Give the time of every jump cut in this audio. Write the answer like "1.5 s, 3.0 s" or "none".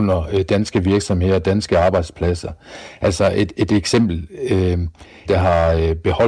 5.3 s